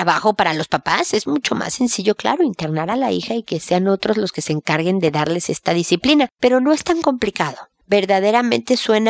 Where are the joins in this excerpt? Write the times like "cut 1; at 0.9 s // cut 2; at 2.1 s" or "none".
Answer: cut 1; at 6.3 s